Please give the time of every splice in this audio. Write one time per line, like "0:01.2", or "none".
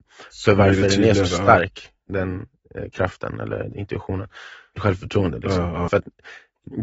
0:02.1
0:04.7
0:05.9

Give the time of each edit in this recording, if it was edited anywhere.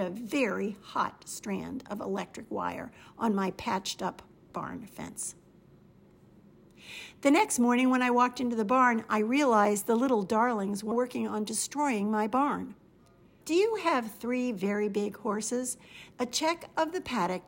0:10.9
0:13.4
0:16.1

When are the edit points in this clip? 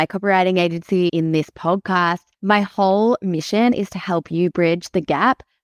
0:01.1
0:02.3

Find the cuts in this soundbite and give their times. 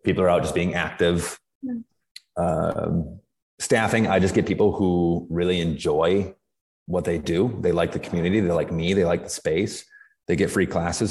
none

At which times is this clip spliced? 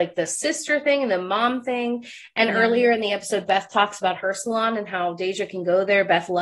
none

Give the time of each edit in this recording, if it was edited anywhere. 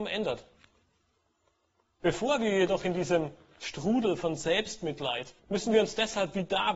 0:02.0
0:05.4

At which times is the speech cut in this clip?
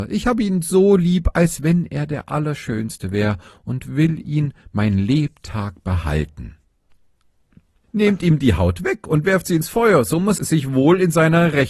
0:07.8
0:10.4

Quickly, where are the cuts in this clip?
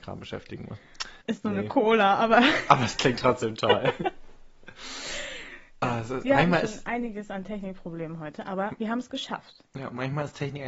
0:01.2

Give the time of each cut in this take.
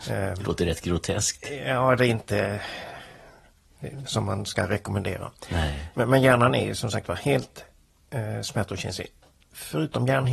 0:04.1

